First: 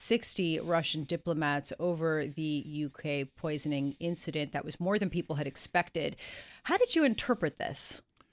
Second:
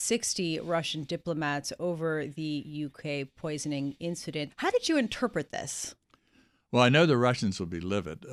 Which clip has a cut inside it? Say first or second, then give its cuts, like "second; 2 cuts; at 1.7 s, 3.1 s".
second; 1 cut; at 4.5 s